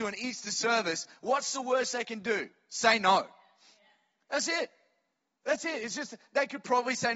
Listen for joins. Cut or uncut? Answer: uncut